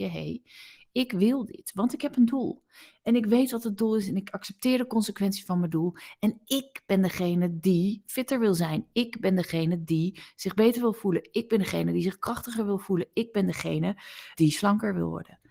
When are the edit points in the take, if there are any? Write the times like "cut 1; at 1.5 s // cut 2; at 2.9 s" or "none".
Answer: cut 1; at 14.3 s